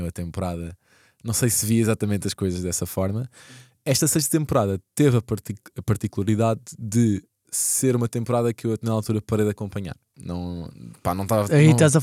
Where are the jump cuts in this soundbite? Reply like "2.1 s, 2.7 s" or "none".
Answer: 7.5 s